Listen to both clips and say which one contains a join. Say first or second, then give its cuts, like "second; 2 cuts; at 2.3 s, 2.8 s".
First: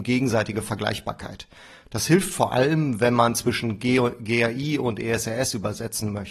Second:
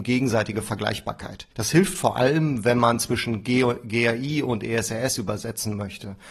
second; 1 cut; at 1.5 s